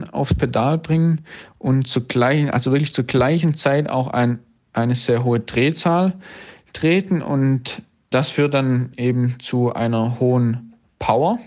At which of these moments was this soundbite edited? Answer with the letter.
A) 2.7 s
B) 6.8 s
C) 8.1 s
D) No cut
C